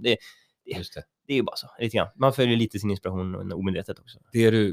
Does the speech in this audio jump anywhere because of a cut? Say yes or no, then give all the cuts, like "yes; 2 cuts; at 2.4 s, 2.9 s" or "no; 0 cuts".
no; 0 cuts